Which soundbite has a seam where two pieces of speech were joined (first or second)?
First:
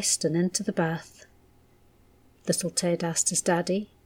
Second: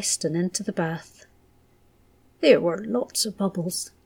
first